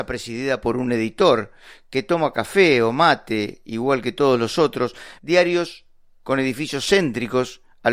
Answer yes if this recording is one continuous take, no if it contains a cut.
no